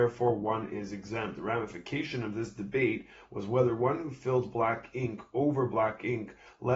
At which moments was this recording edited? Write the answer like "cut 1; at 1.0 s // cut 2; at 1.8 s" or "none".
none